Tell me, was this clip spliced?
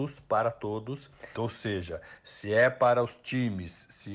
yes; 1 cut; at 1.4 s

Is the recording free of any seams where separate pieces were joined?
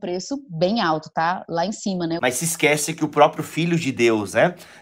no; 1 cut; at 2.2 s

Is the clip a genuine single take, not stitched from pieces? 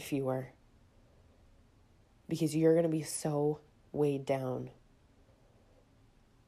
yes; 0 cuts

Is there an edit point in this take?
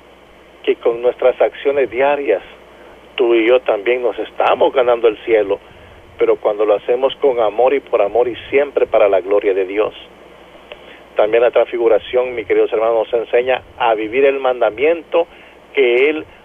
no; 0 cuts

